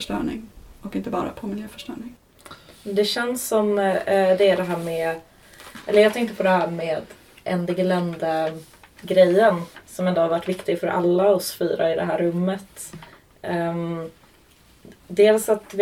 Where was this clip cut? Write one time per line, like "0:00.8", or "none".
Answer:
none